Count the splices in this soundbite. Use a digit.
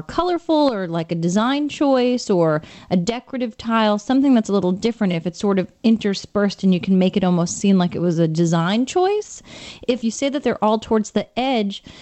0